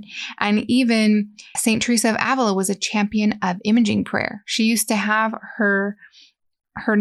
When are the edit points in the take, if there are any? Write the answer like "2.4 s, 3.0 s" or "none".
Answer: 1.5 s